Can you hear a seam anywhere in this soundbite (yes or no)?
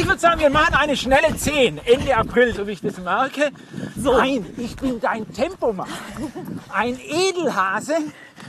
yes